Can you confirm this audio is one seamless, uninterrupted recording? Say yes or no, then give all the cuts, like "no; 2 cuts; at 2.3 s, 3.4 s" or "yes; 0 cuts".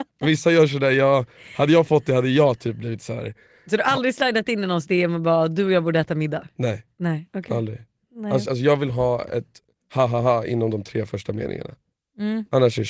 no; 1 cut; at 8.4 s